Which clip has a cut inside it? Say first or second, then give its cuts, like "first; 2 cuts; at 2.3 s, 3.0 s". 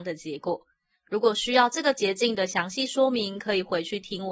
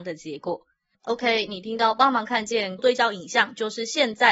second; 2 cuts; at 0.9 s, 2.8 s